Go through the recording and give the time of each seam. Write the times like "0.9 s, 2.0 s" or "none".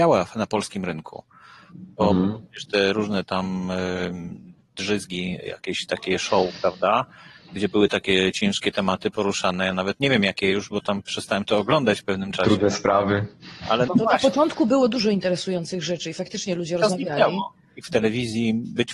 13.9 s, 17.8 s